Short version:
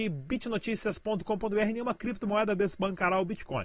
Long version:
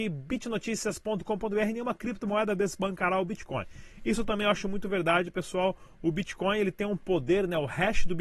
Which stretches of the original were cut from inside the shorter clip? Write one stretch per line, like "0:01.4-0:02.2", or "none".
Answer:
none

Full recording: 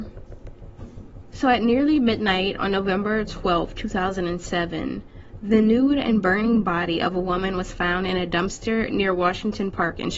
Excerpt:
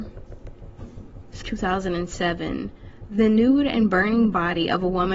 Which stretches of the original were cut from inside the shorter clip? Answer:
0:01.4-0:03.7

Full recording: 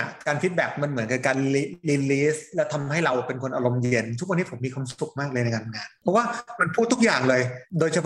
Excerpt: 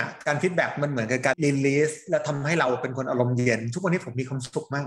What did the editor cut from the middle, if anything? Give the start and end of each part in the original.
0:01.3-0:01.8

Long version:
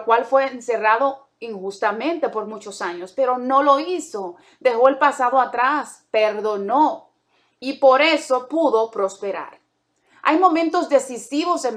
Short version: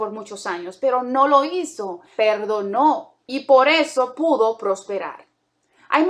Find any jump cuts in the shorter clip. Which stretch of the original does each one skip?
0:04.5-0:06.1
0:07.2-0:07.5

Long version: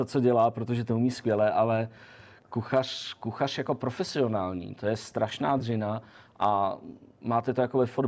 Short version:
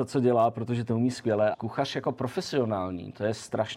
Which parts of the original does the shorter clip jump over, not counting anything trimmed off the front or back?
0:01.5-0:03.2

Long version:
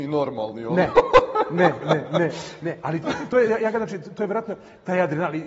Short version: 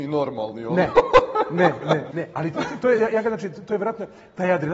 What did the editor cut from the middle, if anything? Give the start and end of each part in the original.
0:02.1-0:02.6

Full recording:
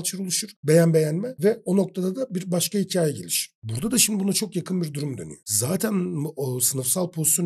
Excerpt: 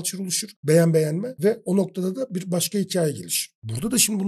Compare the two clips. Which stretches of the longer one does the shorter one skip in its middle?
none

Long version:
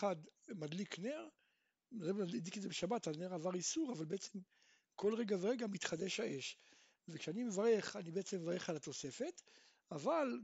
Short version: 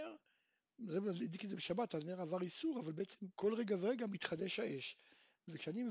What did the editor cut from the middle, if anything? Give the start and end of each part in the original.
0:04.5-0:04.9

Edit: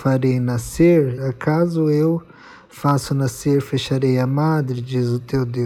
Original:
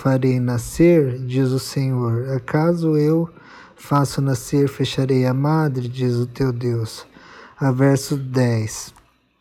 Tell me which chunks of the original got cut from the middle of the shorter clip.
0:01.2-0:02.2

